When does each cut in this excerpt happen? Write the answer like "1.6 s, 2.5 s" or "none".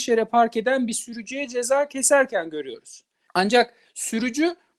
3.3 s

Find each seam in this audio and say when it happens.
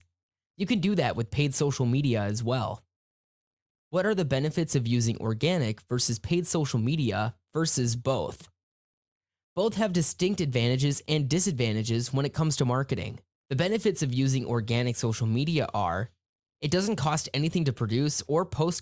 13.3 s

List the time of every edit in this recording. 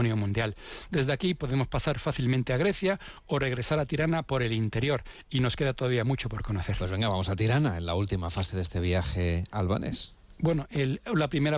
10.4 s

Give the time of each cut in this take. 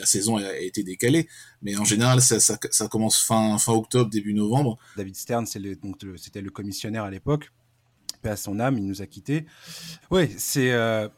5.0 s, 10.0 s

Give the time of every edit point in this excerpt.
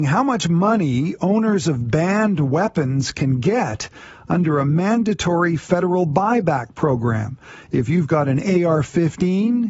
none

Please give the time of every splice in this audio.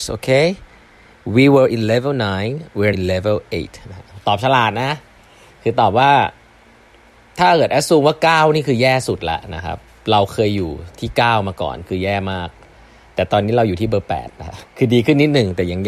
2.9 s

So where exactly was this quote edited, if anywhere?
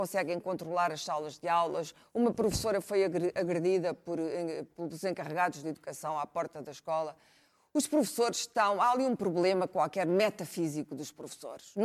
none

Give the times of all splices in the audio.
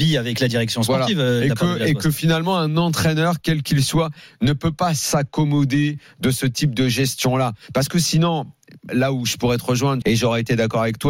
8.9 s, 10.0 s

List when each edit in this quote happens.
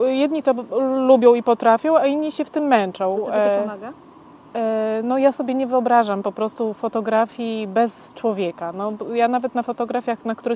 none

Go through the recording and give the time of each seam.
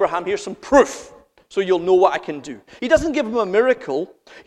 none

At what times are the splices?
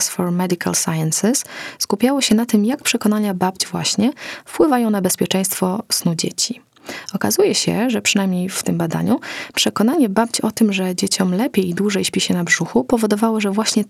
none

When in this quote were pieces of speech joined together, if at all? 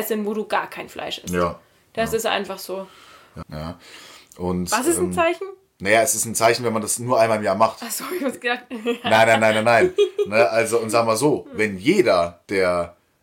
3.4 s

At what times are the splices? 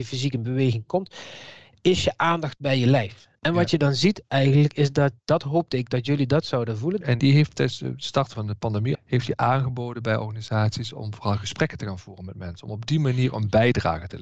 3.4 s, 7.0 s, 8.9 s

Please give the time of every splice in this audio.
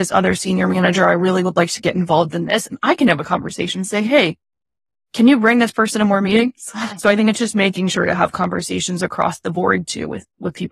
none

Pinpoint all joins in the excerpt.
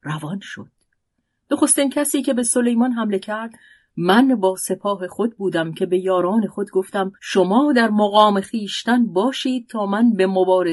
7.2 s

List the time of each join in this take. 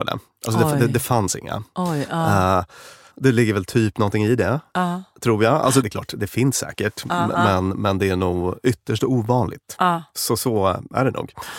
3.1 s

